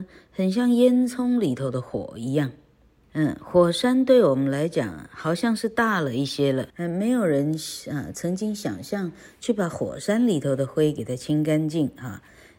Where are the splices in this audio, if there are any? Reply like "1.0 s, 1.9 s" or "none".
3.0 s, 6.7 s